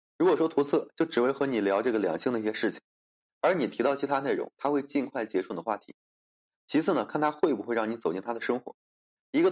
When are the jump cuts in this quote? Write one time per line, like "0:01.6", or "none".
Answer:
none